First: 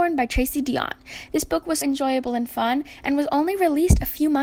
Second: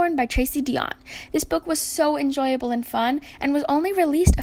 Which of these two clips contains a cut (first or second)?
first